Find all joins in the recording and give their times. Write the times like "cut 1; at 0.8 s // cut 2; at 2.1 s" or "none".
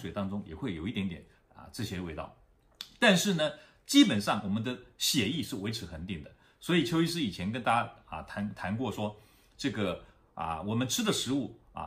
none